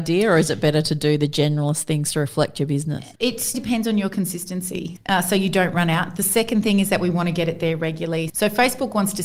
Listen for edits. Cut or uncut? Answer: cut